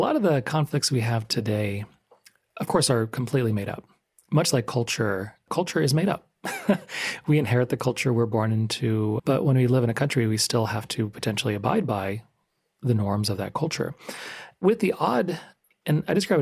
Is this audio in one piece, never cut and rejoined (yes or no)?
no